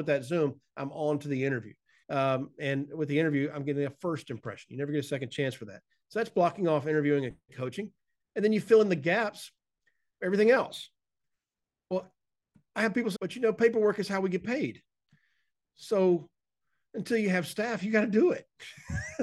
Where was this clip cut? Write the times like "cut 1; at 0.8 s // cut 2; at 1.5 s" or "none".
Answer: cut 1; at 2.0 s // cut 2; at 13.2 s

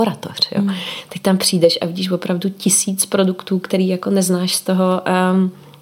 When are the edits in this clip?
none

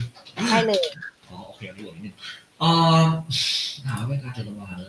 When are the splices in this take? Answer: cut 1; at 1.2 s

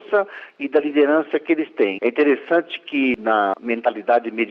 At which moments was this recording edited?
cut 1; at 2.0 s

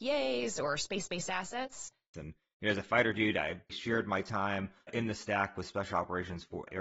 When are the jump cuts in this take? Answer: cut 1; at 2.1 s // cut 2; at 3.7 s

